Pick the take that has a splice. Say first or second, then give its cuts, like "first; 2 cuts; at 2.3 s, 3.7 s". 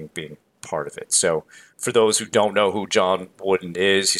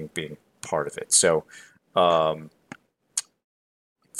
first; 1 cut; at 1.7 s